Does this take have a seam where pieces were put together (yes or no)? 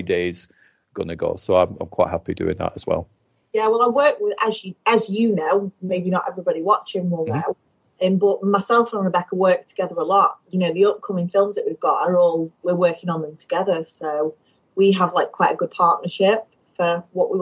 no